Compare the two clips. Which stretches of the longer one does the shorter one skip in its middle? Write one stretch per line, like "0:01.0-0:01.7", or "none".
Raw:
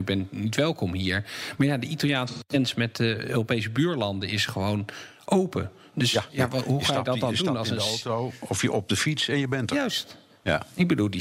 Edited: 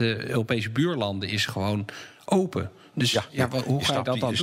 none

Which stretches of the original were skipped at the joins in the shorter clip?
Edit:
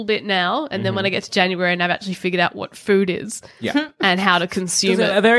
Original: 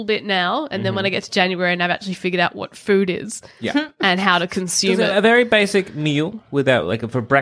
none

